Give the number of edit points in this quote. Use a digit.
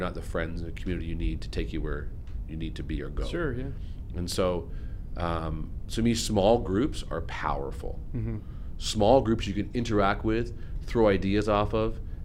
0